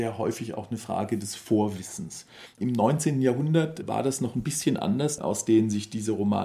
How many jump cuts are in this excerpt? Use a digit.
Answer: 2